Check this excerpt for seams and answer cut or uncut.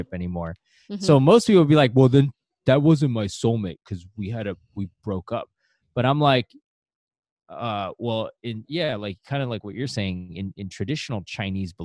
uncut